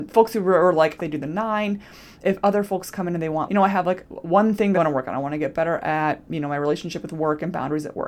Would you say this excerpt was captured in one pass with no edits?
no; 3 cuts; at 1.0 s, 3.5 s, 4.7 s

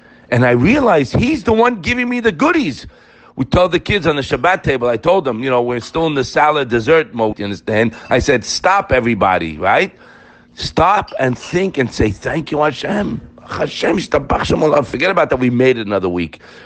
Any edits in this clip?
yes; 1 cut; at 7.3 s

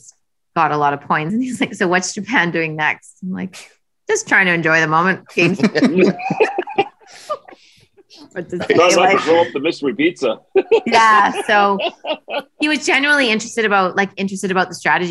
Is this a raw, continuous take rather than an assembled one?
yes; 0 cuts

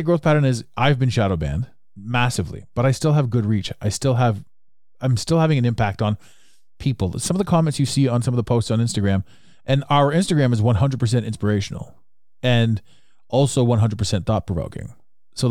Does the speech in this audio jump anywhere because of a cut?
no; 0 cuts

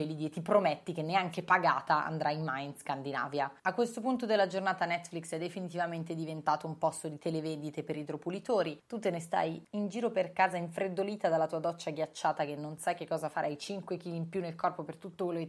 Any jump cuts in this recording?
no; 0 cuts

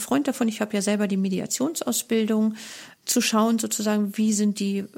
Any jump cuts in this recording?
yes; 1 cut; at 2.9 s

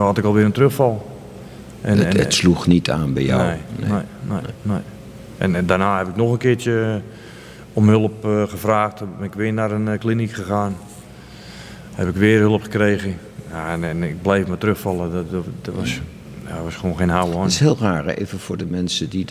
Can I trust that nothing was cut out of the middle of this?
yes; 0 cuts

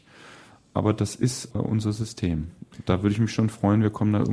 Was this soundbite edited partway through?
yes; 1 cut; at 1.5 s

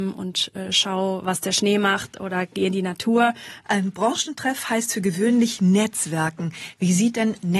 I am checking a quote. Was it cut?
yes; 1 cut; at 3.7 s

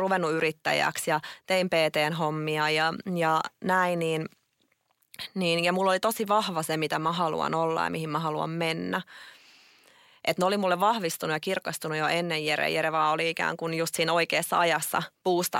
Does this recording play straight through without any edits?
yes; 0 cuts

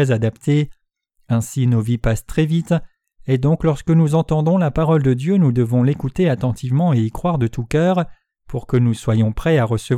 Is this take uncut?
yes; 0 cuts

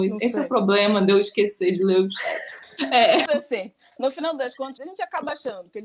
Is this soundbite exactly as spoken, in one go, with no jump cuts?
no; 2 cuts; at 3.3 s, 4.8 s

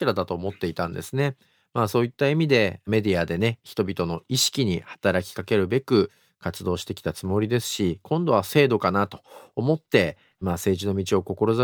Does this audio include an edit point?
no; 0 cuts

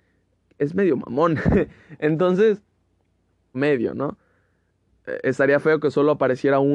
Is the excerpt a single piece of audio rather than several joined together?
no; 1 cut; at 3.5 s

